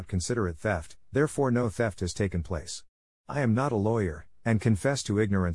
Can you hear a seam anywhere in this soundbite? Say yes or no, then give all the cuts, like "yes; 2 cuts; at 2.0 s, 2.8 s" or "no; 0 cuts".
no; 0 cuts